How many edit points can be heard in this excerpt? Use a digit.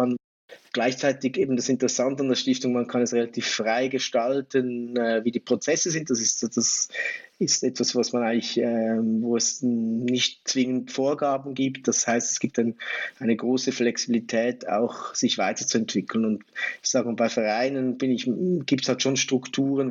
0